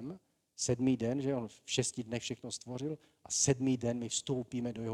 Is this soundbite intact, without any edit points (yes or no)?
yes